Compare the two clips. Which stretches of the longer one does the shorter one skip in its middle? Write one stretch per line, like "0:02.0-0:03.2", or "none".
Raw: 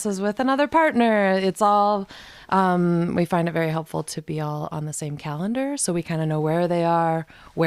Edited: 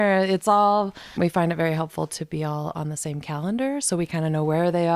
0:02.3-0:03.1